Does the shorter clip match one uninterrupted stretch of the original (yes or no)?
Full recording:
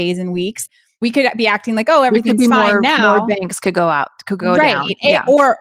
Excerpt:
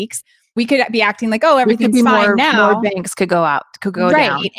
yes